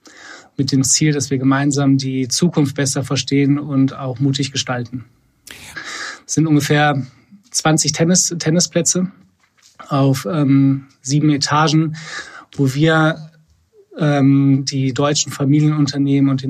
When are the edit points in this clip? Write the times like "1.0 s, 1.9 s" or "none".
5.7 s